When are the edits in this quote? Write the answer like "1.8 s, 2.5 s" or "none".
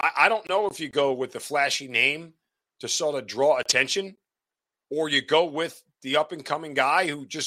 4.8 s